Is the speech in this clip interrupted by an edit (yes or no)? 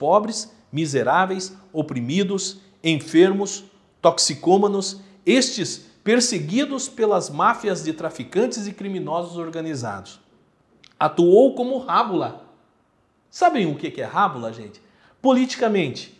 yes